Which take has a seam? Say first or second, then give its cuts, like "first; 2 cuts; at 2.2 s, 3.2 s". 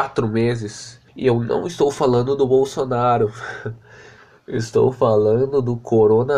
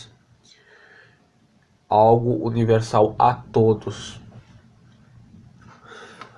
first; 1 cut; at 1.1 s